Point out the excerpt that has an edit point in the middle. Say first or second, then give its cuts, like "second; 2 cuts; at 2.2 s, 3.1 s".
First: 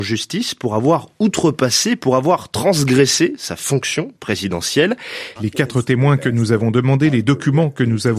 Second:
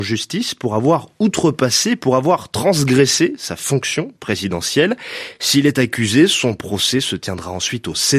first; 1 cut; at 5.4 s